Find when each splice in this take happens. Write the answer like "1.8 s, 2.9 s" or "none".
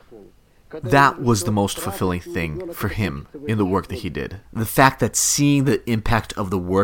4.4 s